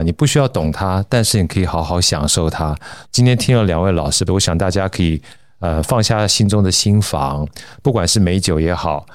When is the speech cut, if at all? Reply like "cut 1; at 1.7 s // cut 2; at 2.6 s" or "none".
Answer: cut 1; at 3.1 s // cut 2; at 4.3 s